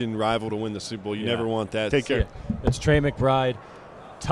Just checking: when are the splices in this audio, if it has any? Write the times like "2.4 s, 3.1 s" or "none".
1.9 s